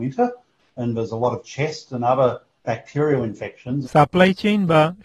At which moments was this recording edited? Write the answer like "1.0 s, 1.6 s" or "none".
3.8 s